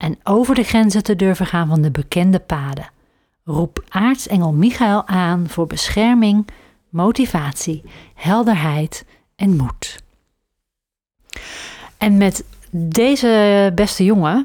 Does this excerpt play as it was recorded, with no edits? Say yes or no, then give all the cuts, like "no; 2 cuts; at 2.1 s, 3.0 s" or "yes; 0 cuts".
yes; 0 cuts